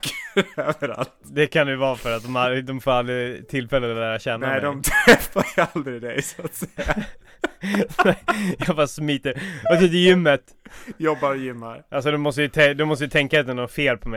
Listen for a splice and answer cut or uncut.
uncut